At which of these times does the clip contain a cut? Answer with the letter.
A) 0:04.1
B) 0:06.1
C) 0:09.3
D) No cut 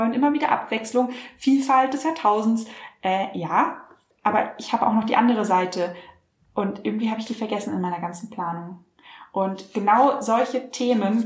A